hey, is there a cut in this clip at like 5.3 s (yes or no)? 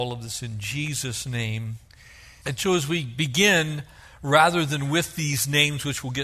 no